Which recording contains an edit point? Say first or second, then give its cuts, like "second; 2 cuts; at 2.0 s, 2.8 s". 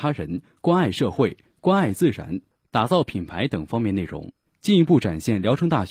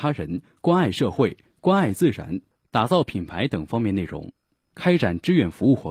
first; 1 cut; at 4.4 s